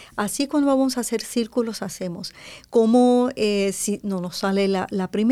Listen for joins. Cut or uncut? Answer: uncut